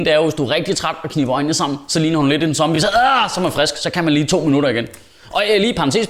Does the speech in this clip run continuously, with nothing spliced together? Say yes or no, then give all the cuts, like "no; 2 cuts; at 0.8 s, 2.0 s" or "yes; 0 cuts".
yes; 0 cuts